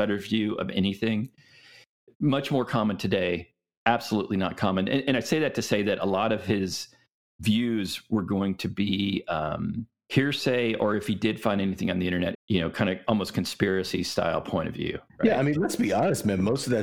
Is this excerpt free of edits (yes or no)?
no